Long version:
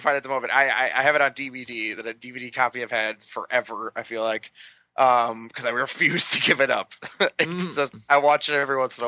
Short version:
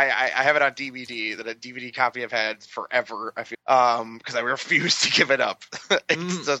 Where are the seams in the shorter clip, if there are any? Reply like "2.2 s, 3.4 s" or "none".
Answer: 3.5 s